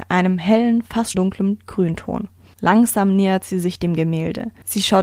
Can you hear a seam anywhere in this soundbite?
yes; 2 cuts; at 1.1 s, 2.5 s

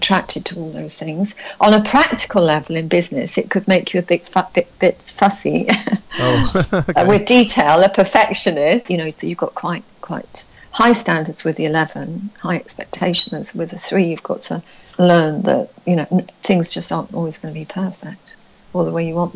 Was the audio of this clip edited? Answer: yes; 1 cut; at 8.9 s

